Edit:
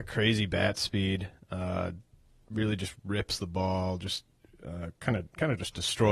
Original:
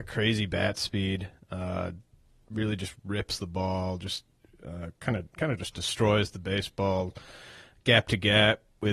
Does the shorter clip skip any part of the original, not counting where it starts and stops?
no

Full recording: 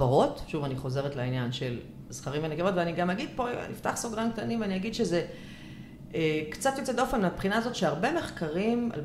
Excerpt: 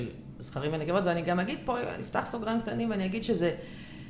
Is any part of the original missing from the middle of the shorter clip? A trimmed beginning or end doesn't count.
no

